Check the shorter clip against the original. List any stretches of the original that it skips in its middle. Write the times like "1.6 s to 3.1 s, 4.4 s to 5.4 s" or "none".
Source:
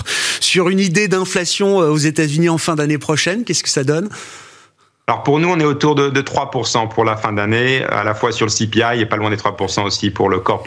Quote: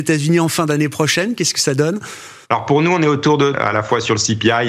4.5 s to 5.0 s, 6.1 s to 7.8 s

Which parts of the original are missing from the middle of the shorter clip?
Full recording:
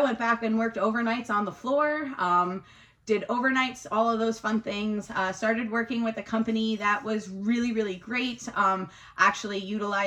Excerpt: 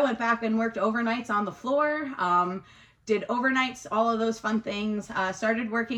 none

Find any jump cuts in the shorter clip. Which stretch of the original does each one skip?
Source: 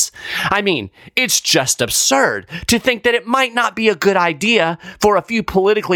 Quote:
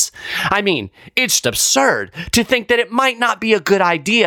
1.4 s to 1.8 s

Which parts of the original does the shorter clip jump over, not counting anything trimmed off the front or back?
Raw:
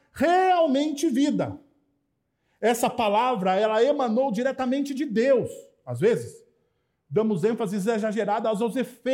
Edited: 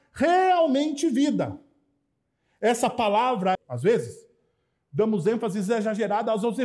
3.6 s to 5.7 s

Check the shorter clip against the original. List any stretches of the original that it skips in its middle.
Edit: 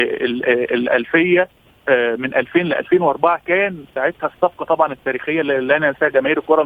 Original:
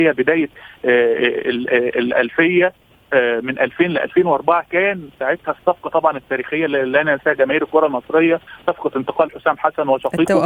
none

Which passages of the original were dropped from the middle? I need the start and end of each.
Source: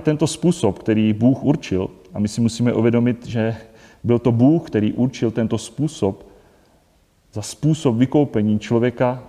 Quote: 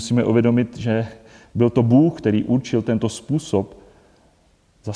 none

